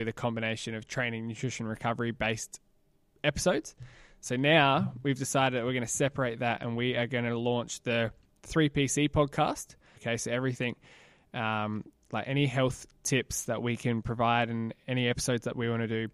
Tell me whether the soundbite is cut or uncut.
cut